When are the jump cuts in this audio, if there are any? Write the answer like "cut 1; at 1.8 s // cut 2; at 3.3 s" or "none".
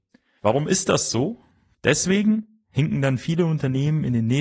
cut 1; at 1.7 s